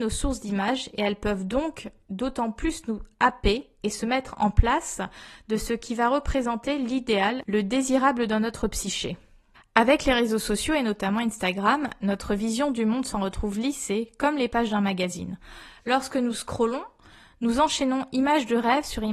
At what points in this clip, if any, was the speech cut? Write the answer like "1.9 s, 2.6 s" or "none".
none